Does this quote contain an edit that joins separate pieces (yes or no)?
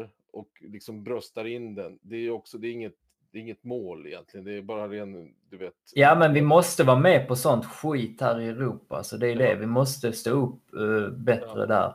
no